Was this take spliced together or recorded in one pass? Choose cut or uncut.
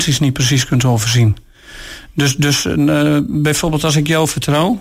uncut